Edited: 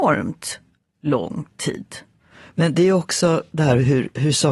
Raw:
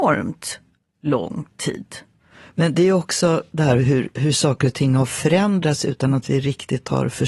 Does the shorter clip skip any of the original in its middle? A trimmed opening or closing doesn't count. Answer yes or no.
no